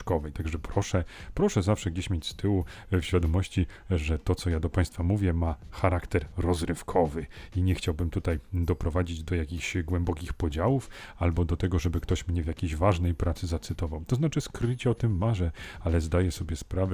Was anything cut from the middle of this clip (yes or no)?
no